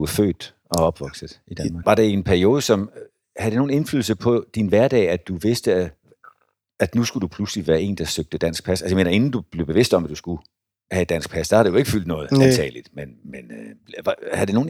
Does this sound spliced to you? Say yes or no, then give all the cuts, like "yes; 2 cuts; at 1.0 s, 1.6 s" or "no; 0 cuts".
yes; 1 cut; at 1.8 s